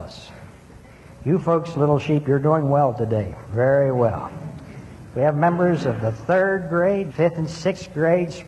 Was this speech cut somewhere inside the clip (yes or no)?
yes